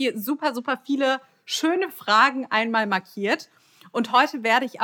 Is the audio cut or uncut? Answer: uncut